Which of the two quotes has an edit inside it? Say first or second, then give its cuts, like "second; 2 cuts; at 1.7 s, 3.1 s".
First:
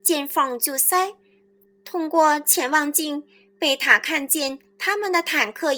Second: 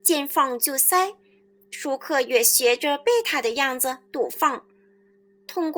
first; 1 cut; at 1.7 s